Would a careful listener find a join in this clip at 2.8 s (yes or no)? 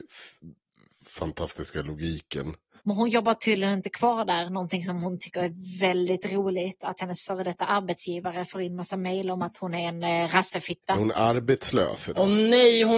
yes